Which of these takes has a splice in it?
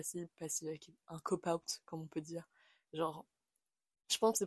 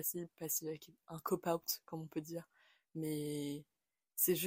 first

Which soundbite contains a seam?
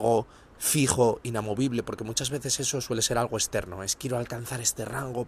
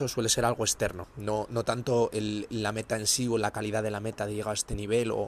second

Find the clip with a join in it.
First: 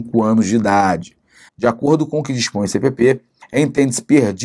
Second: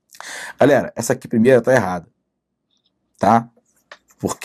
first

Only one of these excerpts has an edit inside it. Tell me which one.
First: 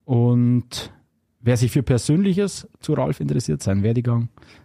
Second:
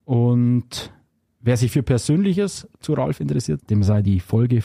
second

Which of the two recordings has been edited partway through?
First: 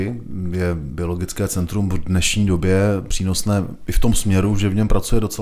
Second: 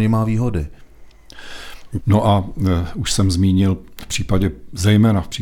second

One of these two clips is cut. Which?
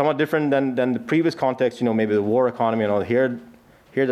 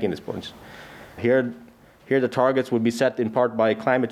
second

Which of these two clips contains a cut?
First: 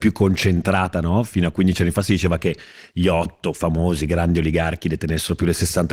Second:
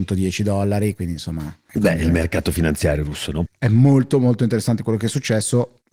second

